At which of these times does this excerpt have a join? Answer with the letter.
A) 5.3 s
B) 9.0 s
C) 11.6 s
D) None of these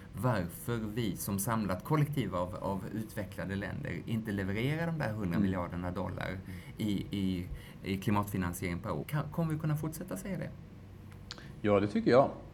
B